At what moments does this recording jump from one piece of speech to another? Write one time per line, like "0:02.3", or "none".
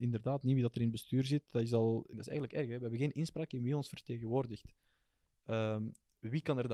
0:02.1

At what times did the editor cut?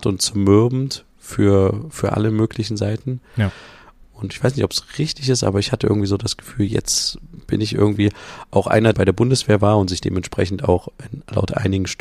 0:04.0
0:08.9

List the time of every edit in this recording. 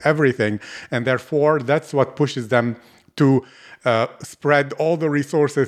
none

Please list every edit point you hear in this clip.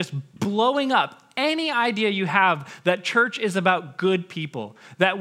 none

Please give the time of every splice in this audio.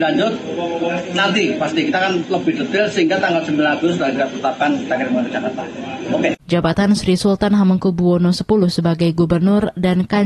0:06.4

